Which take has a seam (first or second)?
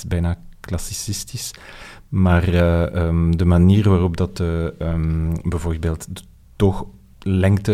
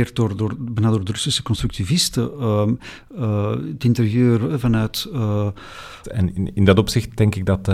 second